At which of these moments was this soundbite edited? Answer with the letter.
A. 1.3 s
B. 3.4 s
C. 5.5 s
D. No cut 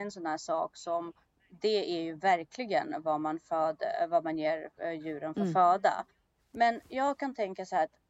D